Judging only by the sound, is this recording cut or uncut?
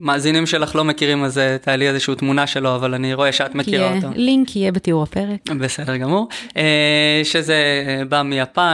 uncut